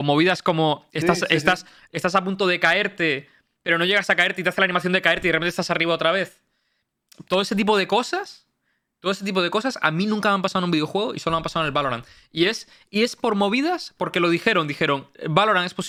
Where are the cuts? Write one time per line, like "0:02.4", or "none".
none